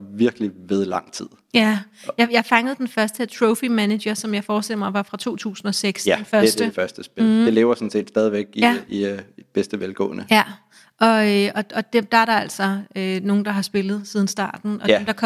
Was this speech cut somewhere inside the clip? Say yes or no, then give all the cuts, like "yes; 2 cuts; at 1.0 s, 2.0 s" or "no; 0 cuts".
no; 0 cuts